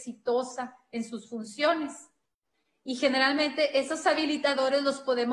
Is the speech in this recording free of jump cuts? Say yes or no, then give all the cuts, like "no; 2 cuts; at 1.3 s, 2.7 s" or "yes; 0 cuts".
yes; 0 cuts